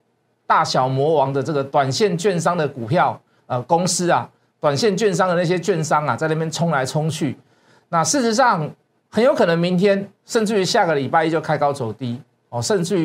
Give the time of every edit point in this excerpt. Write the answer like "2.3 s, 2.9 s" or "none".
none